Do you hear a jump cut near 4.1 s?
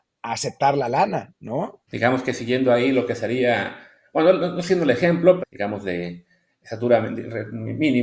no; 2 cuts; at 1.9 s, 5.4 s

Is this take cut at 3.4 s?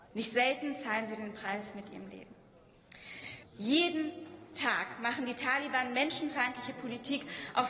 yes; 1 cut; at 3.4 s

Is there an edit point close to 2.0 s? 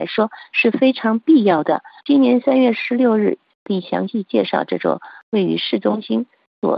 yes; 2 cuts; at 2.0 s, 3.5 s

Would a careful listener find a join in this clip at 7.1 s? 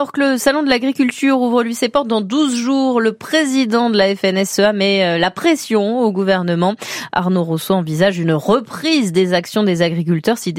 no; 0 cuts

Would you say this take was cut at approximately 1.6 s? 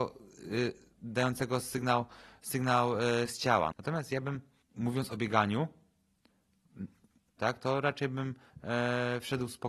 no; 2 cuts; at 3.7 s, 7.4 s

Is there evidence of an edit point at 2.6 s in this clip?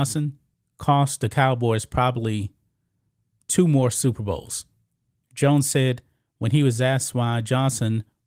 no; 1 cut; at 5.2 s

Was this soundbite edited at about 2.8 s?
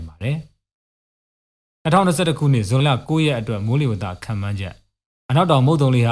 yes; 1 cut; at 2.8 s

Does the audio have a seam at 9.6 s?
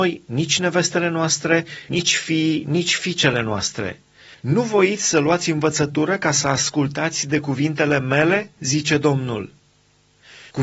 no; 1 cut; at 4.3 s

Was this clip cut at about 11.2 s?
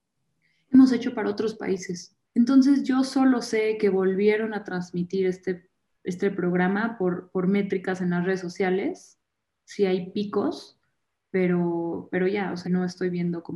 no; 2 cuts; at 2.2 s, 12.6 s

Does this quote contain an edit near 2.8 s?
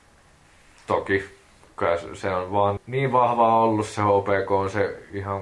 yes; 1 cut; at 2.8 s

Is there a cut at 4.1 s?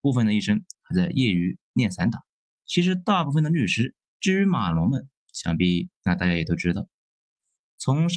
yes; 2 cuts; at 2.6 s, 4.1 s

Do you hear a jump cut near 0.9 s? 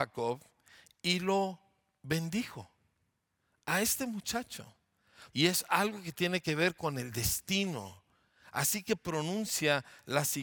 no; 1 cut; at 5.3 s

